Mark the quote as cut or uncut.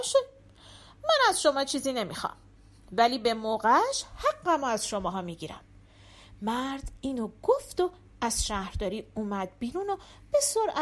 uncut